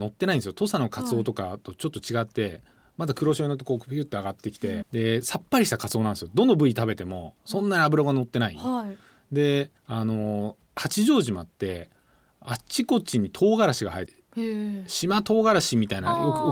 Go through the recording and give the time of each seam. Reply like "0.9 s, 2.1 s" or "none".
4.8 s, 9.8 s, 14.1 s